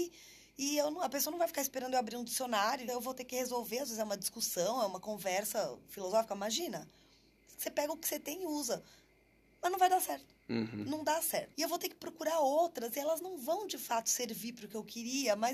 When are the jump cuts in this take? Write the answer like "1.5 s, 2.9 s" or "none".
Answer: 2.9 s, 11.5 s